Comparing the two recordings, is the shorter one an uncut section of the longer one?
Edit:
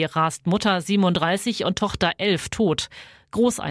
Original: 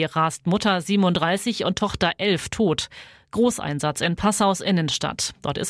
yes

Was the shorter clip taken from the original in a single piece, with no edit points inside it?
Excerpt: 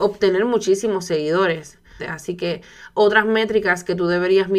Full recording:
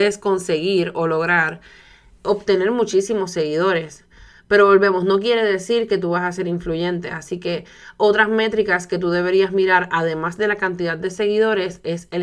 no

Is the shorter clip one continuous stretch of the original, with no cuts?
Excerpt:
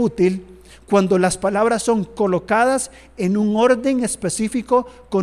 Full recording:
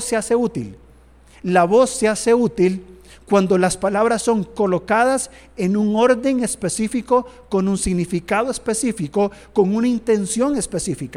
yes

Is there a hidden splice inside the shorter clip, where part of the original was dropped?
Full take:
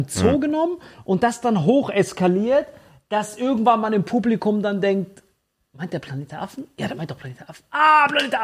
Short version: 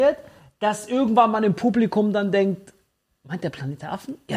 no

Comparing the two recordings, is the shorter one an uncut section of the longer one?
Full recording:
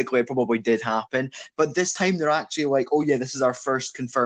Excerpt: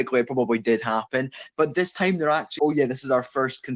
no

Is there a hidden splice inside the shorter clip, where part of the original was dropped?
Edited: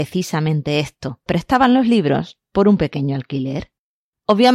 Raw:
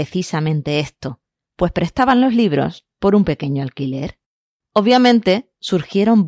yes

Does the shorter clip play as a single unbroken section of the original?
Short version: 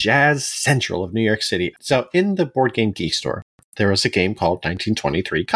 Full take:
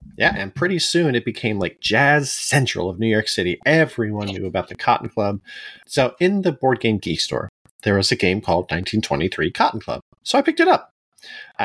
no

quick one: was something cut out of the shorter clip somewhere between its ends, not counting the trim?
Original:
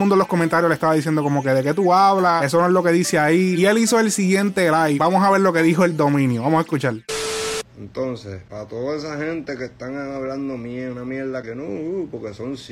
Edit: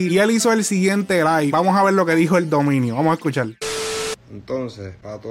no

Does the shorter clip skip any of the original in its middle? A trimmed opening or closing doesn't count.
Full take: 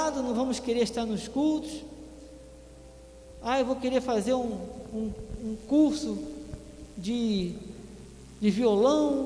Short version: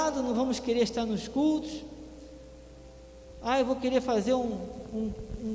no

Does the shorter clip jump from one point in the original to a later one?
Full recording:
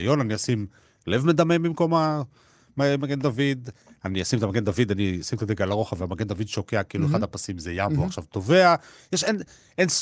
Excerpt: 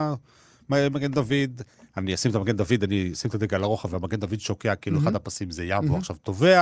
no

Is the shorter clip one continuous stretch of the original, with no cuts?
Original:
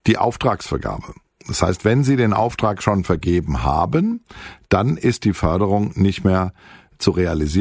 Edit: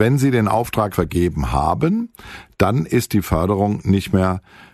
no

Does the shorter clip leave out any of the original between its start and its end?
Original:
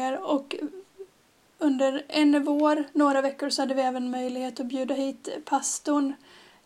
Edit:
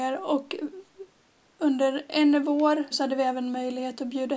yes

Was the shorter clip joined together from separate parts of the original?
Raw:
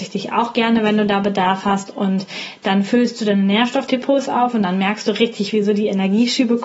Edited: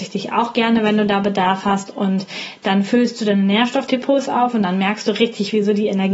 no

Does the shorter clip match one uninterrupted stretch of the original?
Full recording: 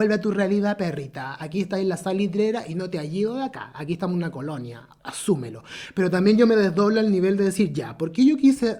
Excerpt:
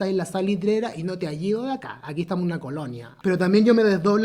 no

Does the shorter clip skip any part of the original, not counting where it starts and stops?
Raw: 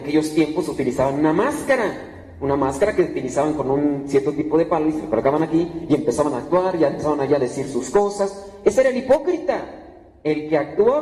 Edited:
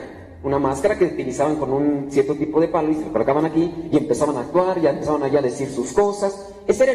no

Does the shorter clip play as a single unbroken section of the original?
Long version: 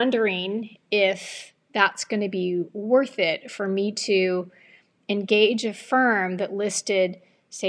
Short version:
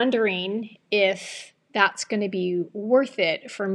yes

